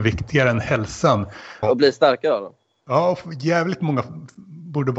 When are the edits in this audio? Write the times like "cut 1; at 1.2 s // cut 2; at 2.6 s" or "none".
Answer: cut 1; at 1.6 s